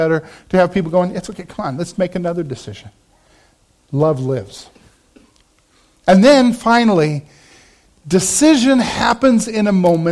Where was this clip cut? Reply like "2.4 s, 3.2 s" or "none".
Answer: none